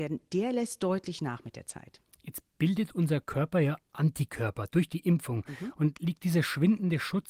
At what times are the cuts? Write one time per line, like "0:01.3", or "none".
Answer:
none